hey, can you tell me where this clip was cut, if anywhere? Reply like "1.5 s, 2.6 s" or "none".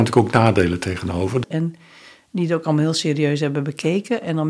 1.4 s